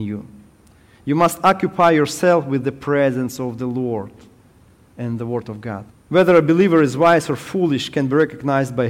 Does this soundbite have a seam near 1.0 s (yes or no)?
no